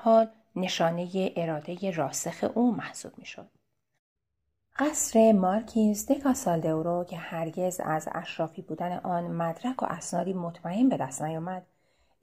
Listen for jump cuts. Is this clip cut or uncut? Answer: uncut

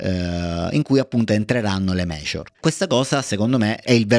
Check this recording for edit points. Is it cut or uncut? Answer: cut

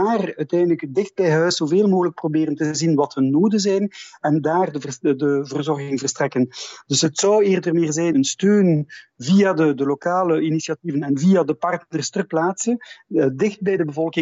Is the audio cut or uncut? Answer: cut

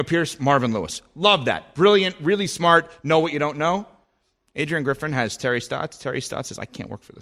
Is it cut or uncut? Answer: uncut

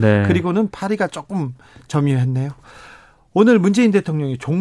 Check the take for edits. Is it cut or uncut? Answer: uncut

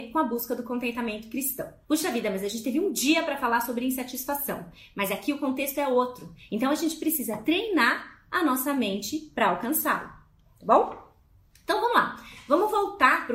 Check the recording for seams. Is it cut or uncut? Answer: cut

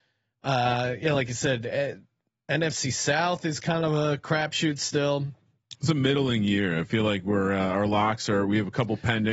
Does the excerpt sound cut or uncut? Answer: uncut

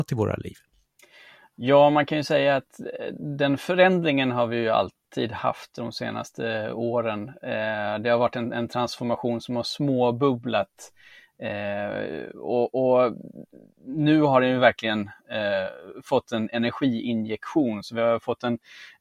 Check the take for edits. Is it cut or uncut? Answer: uncut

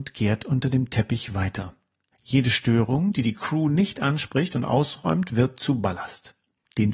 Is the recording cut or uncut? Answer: cut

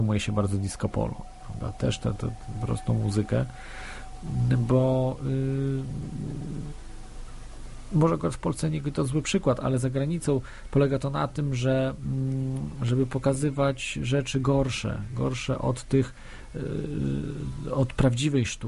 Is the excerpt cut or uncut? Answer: uncut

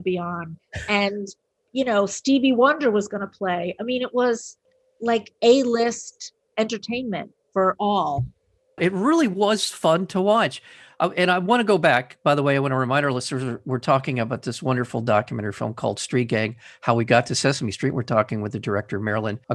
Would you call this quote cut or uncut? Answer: cut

